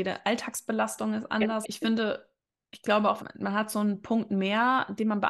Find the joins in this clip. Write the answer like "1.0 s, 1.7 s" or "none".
1.6 s, 3.2 s